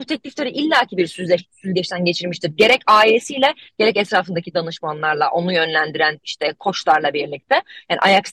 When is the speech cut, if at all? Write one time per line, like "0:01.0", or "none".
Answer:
0:03.7